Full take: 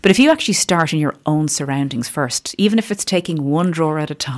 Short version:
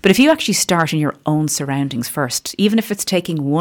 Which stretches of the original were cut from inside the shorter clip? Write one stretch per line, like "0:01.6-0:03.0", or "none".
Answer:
none